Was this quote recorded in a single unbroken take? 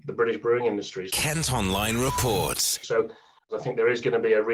no; 2 cuts; at 1.1 s, 2.8 s

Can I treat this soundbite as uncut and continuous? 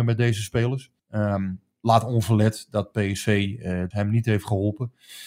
no; 2 cuts; at 1.0 s, 3.9 s

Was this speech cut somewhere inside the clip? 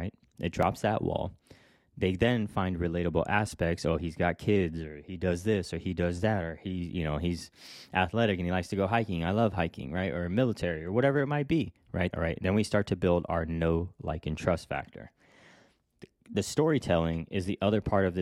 yes; 1 cut; at 12.1 s

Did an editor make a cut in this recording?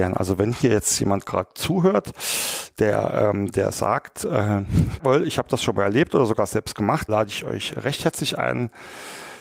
yes; 2 cuts; at 5.0 s, 7.1 s

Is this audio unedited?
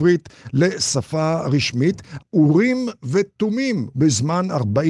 no; 2 cuts; at 2.2 s, 3.9 s

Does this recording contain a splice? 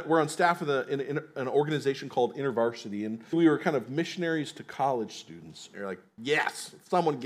yes; 2 cuts; at 3.3 s, 5.7 s

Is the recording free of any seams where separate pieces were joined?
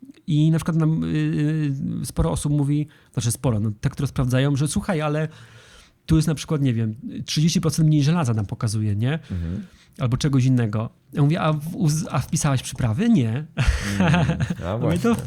yes; 0 cuts

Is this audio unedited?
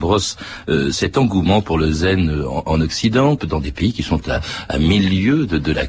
no; 1 cut; at 3.4 s

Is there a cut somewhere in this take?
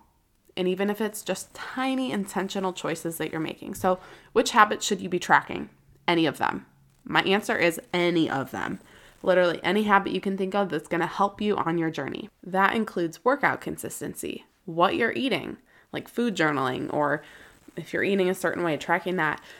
no; 0 cuts

